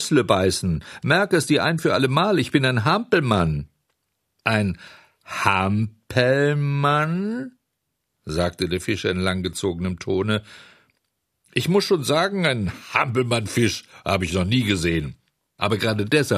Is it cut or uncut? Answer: uncut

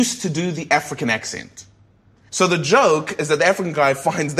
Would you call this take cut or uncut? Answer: cut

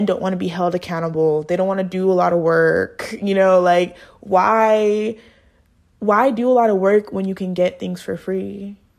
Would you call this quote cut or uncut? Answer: uncut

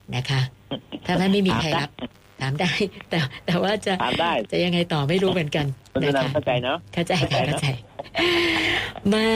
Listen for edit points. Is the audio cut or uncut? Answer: uncut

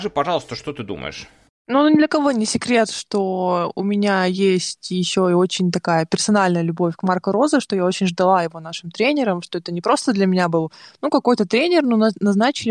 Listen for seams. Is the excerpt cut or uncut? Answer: uncut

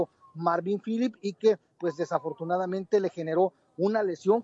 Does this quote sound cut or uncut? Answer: uncut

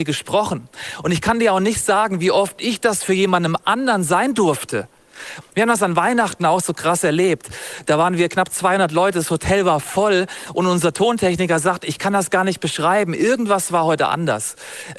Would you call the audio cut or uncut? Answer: cut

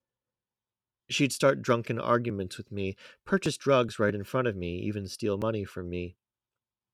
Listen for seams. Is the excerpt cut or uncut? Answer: uncut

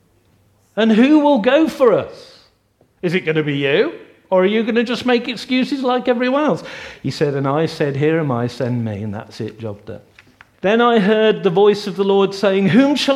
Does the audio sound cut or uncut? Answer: cut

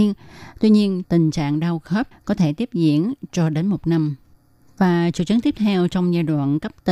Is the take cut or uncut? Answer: cut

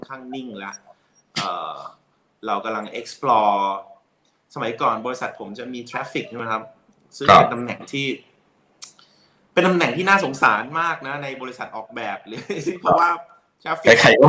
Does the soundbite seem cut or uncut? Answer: uncut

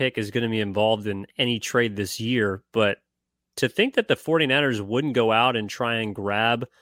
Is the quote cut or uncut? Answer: uncut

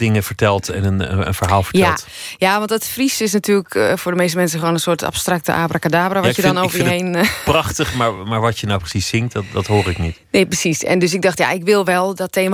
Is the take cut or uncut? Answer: uncut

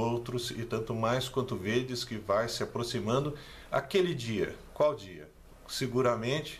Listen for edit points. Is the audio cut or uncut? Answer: cut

